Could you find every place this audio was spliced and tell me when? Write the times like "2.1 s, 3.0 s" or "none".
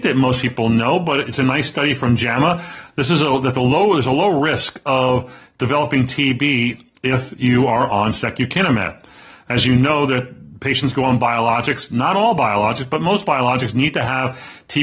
none